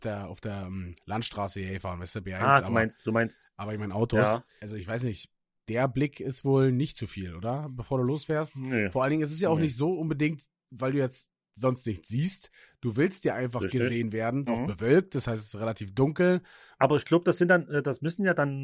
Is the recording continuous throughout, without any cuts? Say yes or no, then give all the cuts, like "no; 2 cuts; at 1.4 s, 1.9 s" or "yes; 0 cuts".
no; 3 cuts; at 4.6 s, 14.5 s, 16.8 s